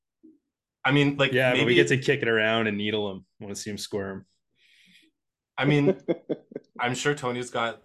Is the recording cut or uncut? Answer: uncut